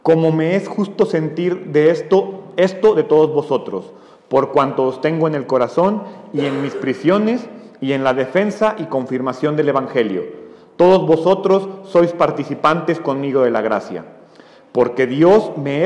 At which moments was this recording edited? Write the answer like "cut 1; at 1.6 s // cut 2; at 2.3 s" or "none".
none